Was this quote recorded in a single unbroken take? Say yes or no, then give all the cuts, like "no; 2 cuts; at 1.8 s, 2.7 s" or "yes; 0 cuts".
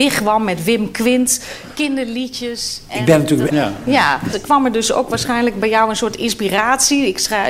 no; 1 cut; at 3.5 s